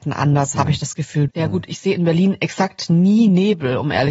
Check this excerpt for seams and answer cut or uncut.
cut